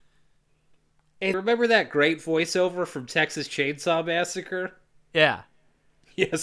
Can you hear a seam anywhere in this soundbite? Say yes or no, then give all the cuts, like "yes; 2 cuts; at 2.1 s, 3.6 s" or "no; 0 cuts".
yes; 1 cut; at 1.3 s